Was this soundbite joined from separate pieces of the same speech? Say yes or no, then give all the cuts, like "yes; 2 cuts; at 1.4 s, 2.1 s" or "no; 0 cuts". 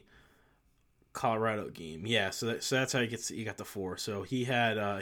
no; 0 cuts